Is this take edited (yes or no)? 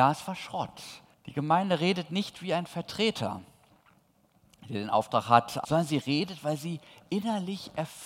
yes